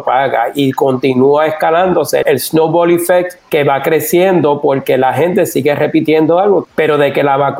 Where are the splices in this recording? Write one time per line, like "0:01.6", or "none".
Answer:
0:02.2
0:03.4
0:06.6